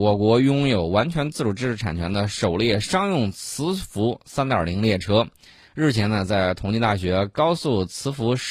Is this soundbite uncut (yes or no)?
yes